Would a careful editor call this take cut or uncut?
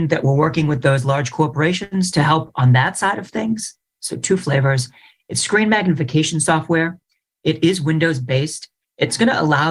cut